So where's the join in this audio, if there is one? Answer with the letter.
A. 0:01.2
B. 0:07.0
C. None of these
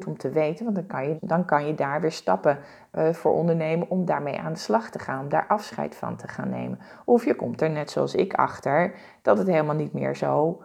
A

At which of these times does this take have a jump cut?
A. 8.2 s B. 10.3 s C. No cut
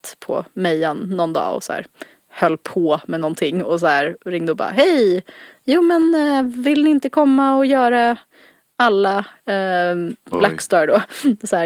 B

